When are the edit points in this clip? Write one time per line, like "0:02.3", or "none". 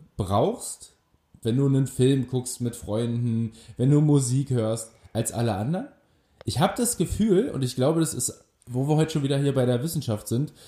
none